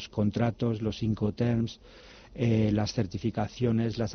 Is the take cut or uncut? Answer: uncut